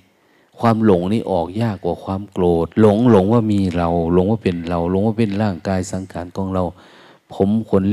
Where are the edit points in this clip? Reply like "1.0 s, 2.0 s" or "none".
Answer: 2.7 s